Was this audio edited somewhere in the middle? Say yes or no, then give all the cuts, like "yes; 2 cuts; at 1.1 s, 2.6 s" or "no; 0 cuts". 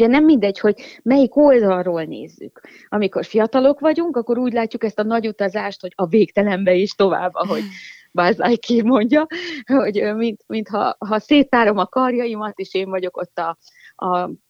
no; 0 cuts